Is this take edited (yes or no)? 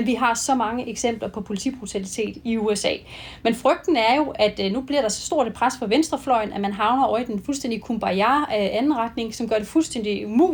no